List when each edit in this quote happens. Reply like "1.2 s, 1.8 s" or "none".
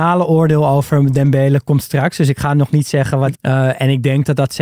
3.3 s